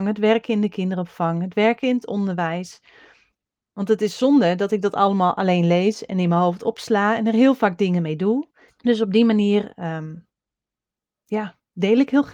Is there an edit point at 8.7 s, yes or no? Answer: yes